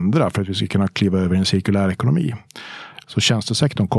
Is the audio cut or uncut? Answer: cut